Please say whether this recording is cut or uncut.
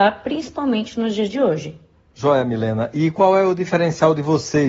uncut